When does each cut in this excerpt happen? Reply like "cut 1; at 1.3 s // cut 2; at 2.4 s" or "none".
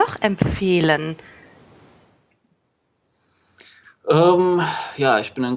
none